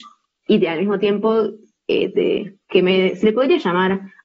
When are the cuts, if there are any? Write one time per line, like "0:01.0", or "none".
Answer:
0:02.1

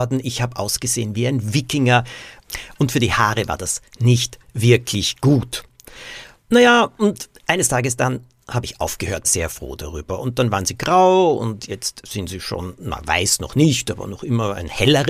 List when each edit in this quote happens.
0:09.2

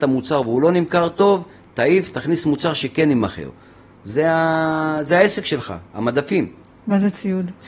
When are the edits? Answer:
0:06.7

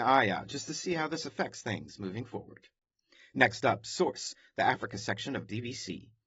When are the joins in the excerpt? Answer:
none

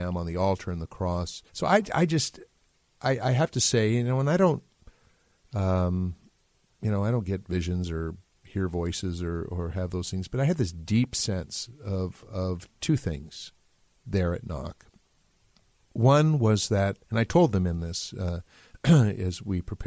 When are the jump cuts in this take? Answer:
0:01.5

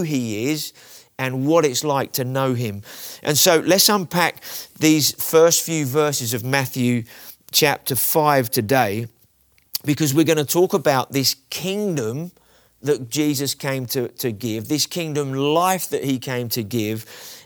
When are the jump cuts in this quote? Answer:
none

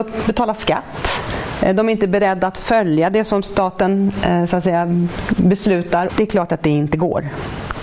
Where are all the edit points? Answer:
0:06.1

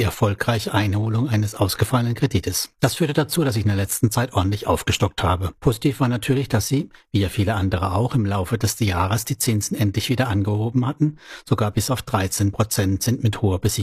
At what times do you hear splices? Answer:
none

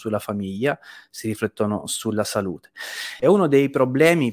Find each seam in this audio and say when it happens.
0:03.2

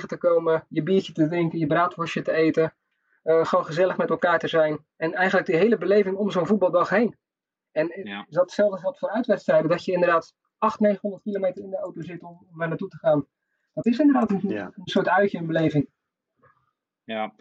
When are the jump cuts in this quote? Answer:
none

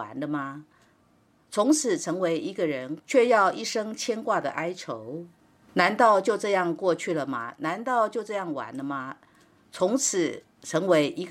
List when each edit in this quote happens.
0:03.0

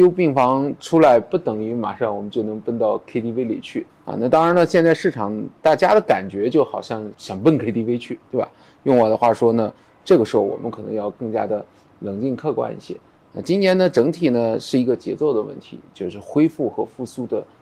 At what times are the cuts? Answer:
0:07.1

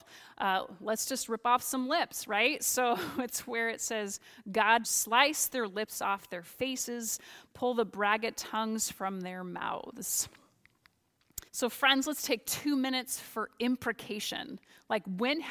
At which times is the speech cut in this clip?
0:04.8
0:11.5

